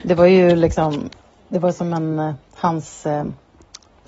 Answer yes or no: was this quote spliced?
no